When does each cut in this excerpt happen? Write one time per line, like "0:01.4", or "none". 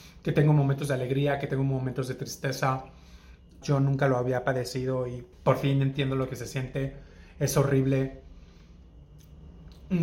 0:03.6
0:05.3